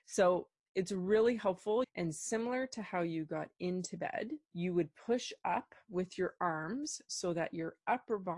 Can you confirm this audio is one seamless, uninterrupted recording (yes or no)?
no